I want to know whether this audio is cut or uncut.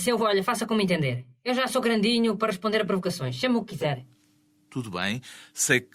uncut